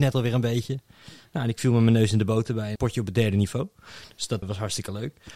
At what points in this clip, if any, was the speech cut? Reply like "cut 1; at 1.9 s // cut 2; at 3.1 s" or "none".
cut 1; at 2.8 s // cut 2; at 4.4 s